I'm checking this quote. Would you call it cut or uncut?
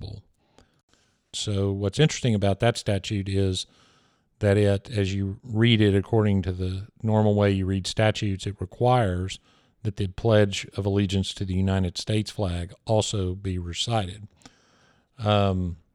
cut